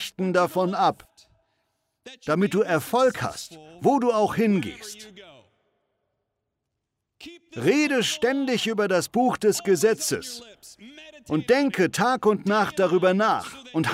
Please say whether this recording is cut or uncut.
uncut